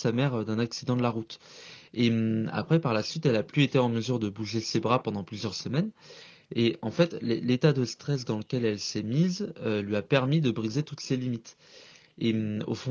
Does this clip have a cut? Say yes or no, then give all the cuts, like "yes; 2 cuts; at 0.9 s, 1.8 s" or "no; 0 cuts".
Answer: no; 0 cuts